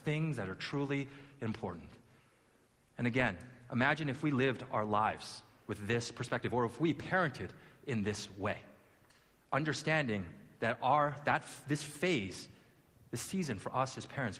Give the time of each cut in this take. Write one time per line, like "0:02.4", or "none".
none